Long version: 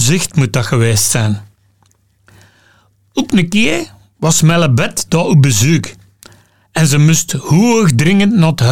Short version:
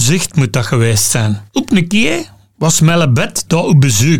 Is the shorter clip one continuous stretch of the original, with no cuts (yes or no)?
no